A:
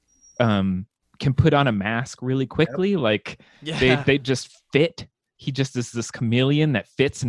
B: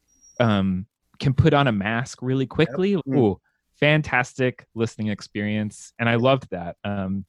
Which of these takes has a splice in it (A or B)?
B